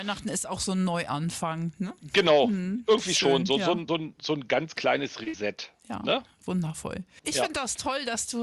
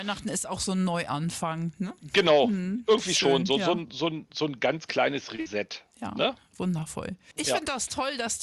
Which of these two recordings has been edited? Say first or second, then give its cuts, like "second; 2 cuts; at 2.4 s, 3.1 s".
first; 1 cut; at 3.9 s